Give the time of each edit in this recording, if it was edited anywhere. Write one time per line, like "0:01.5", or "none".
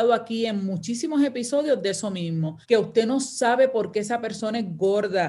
0:02.6